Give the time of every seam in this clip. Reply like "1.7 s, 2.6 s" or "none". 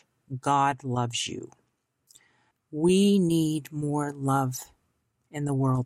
2.5 s